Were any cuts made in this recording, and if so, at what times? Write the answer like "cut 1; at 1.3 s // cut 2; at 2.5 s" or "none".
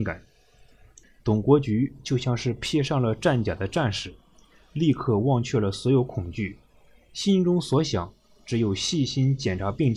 cut 1; at 1.0 s